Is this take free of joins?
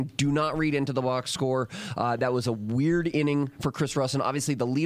yes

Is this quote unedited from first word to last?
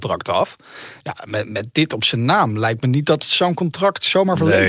yes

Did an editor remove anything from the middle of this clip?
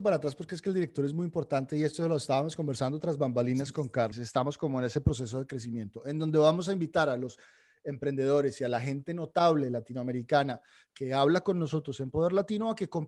yes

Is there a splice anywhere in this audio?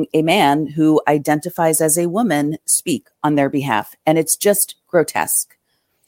no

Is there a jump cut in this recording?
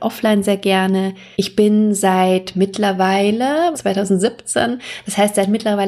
yes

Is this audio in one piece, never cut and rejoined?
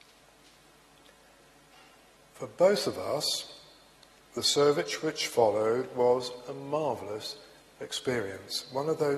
yes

